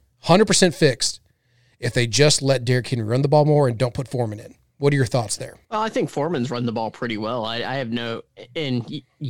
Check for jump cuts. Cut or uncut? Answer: cut